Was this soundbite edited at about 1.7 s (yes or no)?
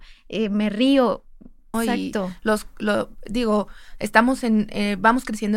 yes